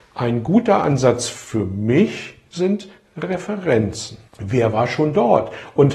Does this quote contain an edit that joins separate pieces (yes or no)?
yes